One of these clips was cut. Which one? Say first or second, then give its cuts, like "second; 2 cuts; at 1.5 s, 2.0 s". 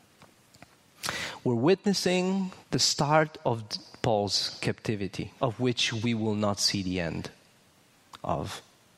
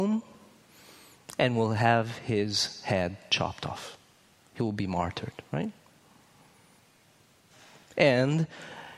first; 2 cuts; at 2.6 s, 5.4 s